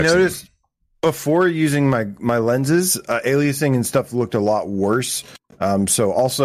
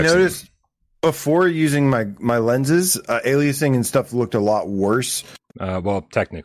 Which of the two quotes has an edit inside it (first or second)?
second